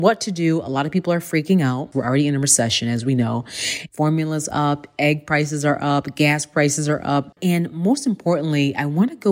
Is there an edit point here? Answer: yes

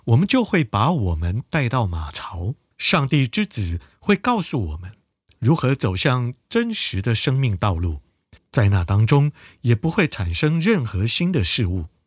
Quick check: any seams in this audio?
yes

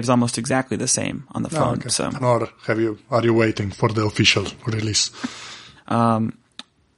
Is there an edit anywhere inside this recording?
yes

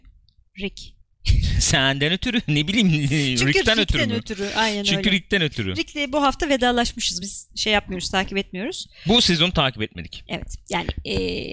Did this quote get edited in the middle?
no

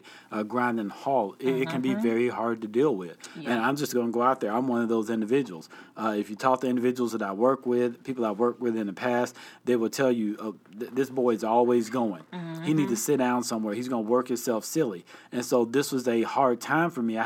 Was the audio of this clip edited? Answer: no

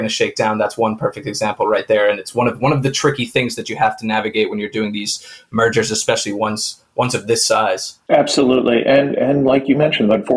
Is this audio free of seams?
yes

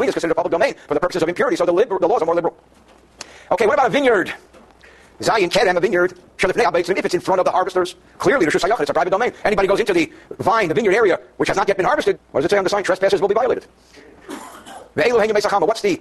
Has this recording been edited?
yes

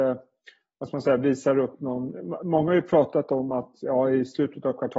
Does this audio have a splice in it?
no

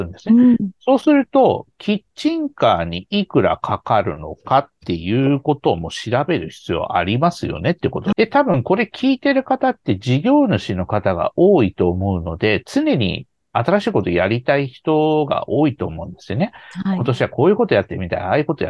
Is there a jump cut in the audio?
yes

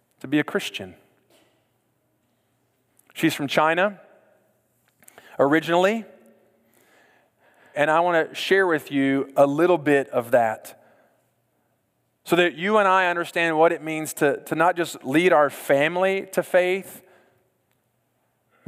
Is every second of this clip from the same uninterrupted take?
no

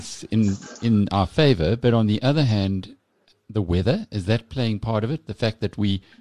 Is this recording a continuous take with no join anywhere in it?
yes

